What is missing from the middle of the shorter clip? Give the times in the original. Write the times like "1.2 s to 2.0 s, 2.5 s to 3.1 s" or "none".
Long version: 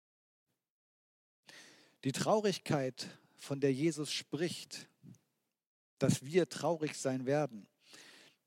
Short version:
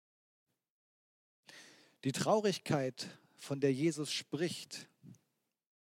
none

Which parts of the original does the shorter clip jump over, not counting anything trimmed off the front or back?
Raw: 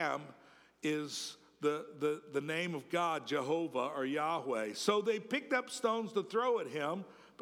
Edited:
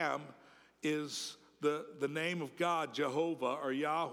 1.9 s to 2.3 s

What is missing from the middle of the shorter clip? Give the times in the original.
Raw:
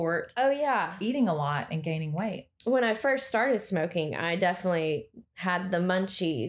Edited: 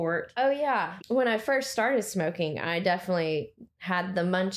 1.0 s to 2.5 s

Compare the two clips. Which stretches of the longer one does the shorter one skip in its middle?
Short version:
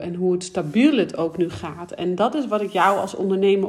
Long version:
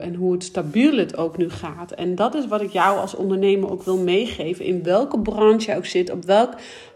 none

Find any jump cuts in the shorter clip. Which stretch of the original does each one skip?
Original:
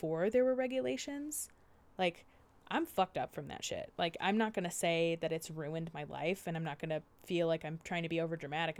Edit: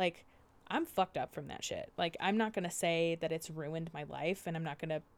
none

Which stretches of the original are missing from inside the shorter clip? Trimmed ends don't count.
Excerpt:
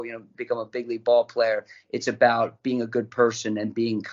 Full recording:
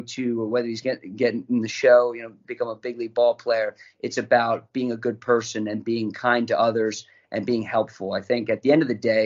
none

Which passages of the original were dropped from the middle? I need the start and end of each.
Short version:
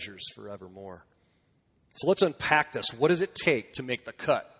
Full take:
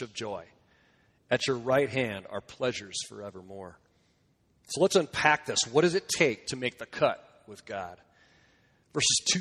none

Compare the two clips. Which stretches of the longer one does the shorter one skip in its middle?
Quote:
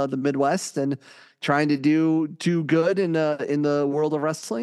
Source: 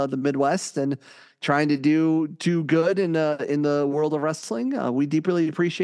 none

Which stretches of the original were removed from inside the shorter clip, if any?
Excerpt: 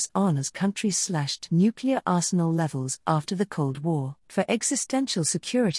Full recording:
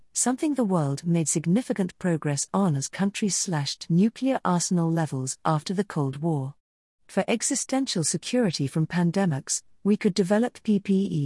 6.6 s to 7.0 s

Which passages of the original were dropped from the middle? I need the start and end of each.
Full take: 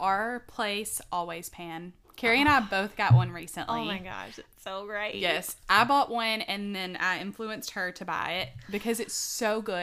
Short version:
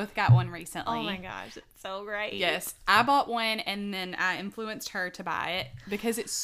none

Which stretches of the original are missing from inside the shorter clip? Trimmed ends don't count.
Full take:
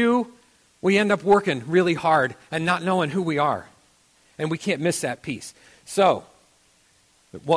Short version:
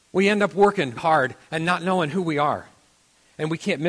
1.6 s to 2.0 s

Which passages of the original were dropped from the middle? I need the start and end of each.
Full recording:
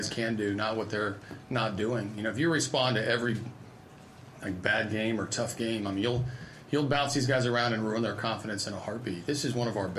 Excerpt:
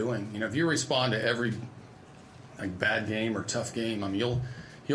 none

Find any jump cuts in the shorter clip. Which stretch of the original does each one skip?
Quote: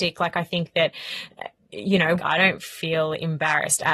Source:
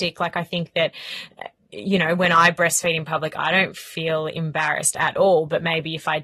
2.2 s to 3.3 s

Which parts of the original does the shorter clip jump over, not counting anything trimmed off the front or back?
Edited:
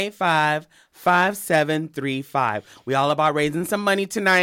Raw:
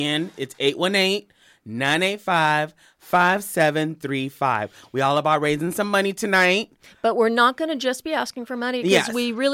none

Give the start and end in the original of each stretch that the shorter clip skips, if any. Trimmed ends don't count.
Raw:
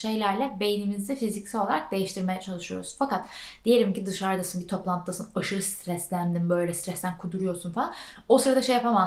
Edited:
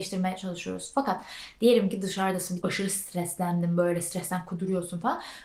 4.6 s to 5.3 s

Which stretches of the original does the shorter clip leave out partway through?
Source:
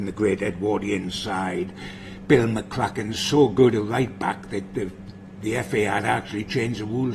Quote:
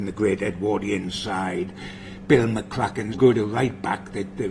3.1 s to 3.5 s

